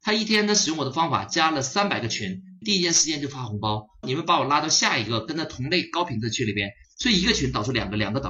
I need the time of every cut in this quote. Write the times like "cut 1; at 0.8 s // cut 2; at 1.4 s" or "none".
cut 1; at 2.6 s // cut 2; at 4.0 s // cut 3; at 6.8 s